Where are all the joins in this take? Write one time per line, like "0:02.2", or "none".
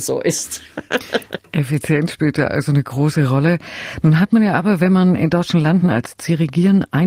none